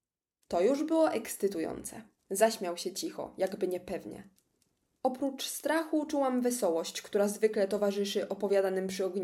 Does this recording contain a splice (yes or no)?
yes